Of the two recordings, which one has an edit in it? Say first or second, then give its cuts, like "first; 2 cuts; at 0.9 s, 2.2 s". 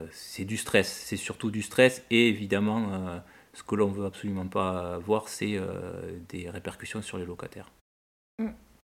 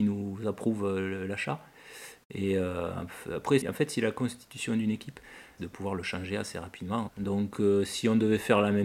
second; 3 cuts; at 3.6 s, 5.6 s, 7.1 s